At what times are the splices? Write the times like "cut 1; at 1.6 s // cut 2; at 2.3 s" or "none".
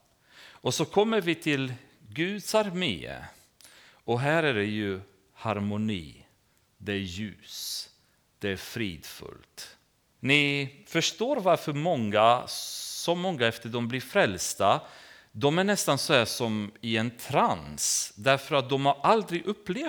cut 1; at 10.2 s